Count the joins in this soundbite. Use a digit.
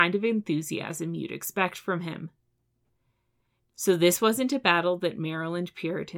1